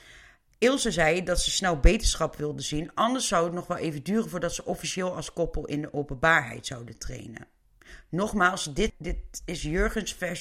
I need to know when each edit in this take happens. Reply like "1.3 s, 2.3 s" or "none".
8.9 s